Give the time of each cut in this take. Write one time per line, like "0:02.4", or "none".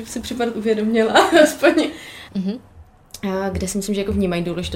0:02.3